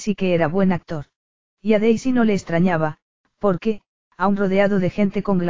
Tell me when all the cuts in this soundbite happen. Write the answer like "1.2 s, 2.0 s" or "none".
1.5 s